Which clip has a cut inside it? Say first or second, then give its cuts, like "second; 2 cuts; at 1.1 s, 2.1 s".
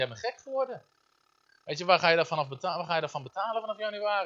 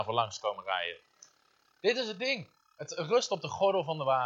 second; 1 cut; at 1.6 s